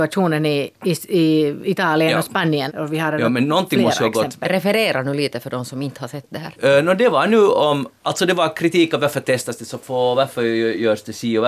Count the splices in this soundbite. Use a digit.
2